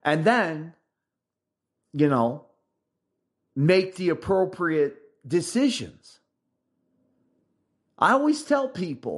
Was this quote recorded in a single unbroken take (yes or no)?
yes